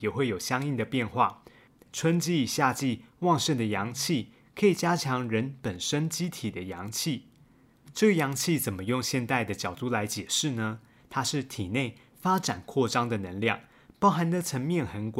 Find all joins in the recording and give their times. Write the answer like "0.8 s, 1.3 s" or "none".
1.8 s